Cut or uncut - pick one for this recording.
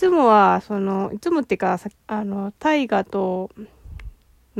cut